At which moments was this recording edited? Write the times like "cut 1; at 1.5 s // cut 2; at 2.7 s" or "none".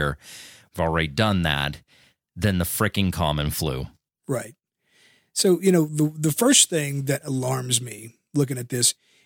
none